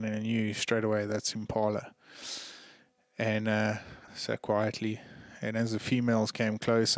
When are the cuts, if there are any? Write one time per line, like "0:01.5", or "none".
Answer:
0:04.1